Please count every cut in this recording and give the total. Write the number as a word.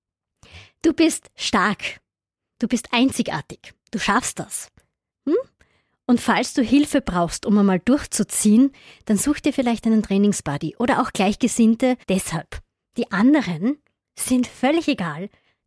two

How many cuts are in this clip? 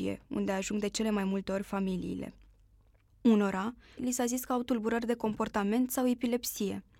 one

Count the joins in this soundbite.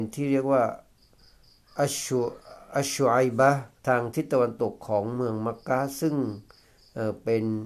one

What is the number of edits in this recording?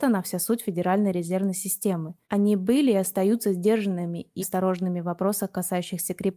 two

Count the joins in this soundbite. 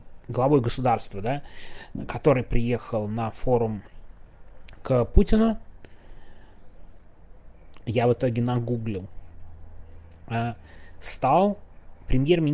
one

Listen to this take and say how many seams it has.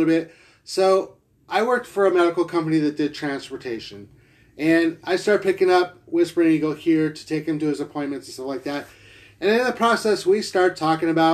zero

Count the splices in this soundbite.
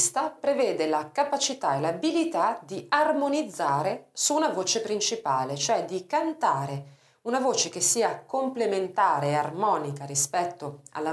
zero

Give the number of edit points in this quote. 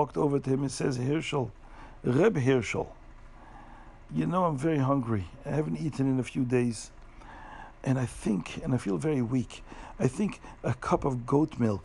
zero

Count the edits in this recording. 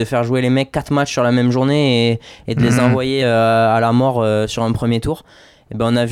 zero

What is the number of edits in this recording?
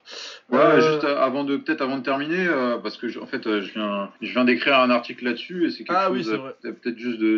one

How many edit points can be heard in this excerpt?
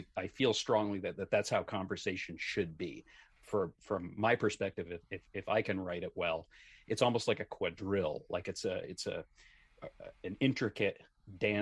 one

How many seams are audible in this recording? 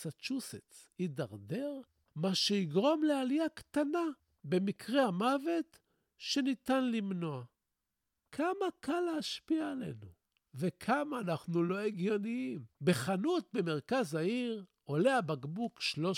two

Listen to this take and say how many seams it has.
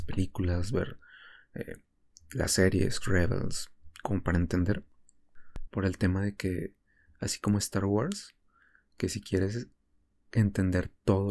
two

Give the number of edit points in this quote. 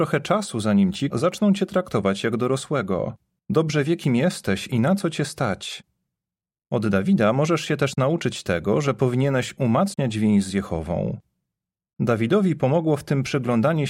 two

